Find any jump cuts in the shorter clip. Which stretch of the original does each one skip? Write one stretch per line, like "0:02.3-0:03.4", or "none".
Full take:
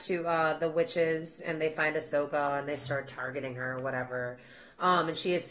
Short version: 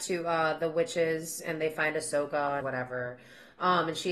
0:02.6-0:03.8